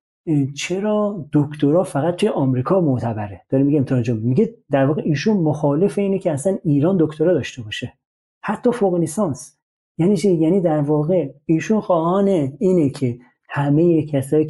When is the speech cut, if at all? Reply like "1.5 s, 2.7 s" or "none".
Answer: none